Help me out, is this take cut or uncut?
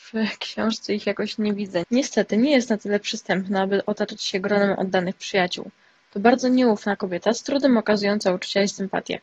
cut